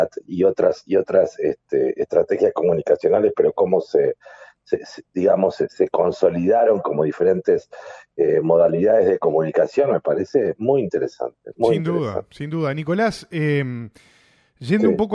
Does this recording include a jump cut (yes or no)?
no